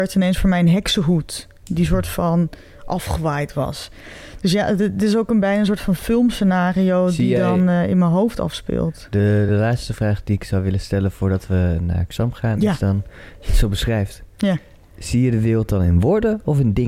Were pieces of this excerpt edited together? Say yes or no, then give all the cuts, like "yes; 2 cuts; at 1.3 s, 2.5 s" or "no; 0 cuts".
no; 0 cuts